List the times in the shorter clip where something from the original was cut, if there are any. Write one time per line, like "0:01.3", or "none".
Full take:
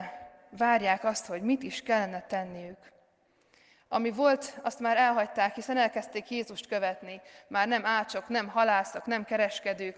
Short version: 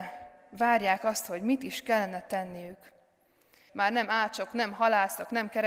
0:03.7